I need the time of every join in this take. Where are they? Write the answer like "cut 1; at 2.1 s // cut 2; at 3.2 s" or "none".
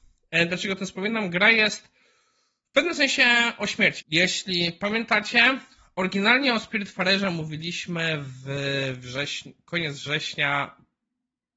cut 1; at 4.0 s